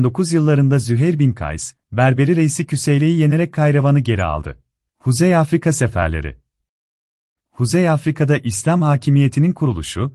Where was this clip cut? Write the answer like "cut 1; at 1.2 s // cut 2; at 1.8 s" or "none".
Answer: cut 1; at 4.9 s